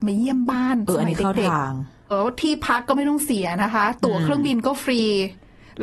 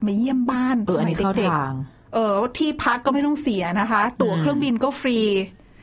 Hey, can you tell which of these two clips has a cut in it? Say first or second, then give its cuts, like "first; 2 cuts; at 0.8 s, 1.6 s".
first; 1 cut; at 2.1 s